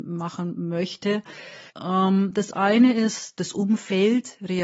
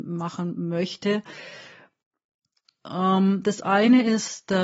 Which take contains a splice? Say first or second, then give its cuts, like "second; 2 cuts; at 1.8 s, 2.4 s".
first; 2 cuts; at 1.7 s, 3.4 s